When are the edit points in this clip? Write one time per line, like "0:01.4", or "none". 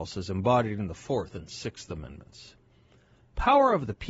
0:01.3